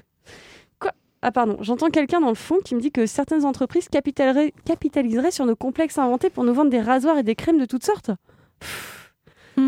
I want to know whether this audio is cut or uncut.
uncut